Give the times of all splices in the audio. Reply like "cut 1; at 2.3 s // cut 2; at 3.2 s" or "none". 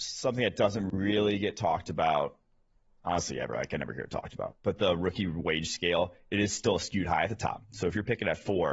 none